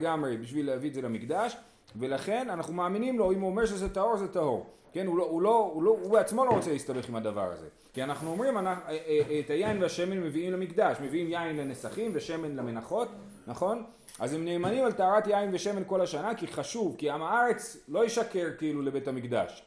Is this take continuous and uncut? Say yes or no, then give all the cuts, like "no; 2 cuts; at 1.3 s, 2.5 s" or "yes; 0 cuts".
no; 1 cut; at 7.9 s